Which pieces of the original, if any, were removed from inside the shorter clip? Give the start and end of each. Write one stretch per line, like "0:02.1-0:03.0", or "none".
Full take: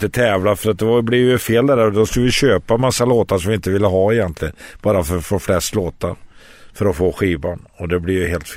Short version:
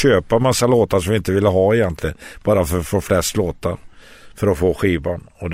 none